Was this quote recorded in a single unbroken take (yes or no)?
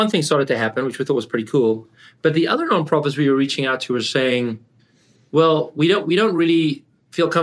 yes